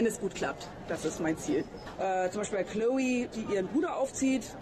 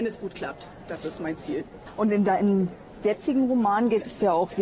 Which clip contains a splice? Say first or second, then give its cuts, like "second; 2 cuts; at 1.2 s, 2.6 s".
first; 2 cuts; at 2.0 s, 3.3 s